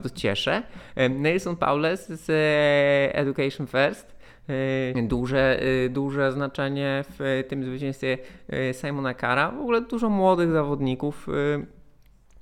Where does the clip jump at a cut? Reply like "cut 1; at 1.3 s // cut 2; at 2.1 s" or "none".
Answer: cut 1; at 4.9 s